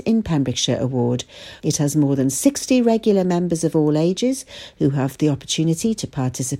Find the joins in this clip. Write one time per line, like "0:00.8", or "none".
0:01.6